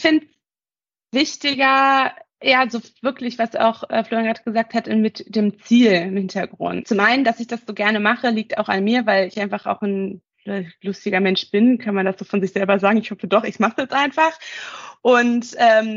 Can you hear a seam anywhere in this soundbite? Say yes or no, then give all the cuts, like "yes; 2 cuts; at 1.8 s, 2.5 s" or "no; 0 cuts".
yes; 1 cut; at 6.8 s